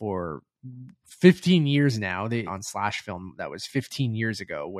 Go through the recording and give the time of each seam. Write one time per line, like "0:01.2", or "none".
0:02.5